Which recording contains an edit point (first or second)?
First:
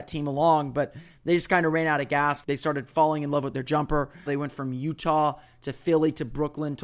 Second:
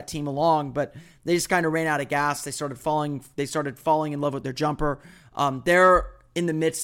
first